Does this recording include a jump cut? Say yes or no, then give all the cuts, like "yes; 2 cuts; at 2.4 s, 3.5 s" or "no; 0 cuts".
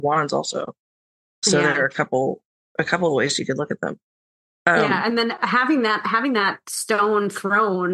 no; 0 cuts